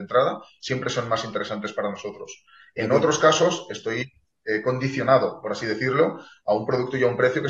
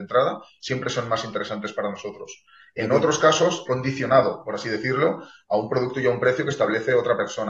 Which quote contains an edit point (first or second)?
second